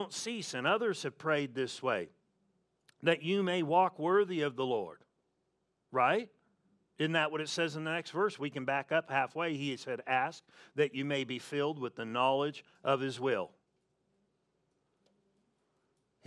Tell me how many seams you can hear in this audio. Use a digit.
0